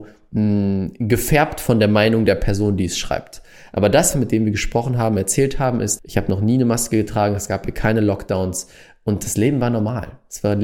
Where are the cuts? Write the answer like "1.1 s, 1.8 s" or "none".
4.1 s, 6.0 s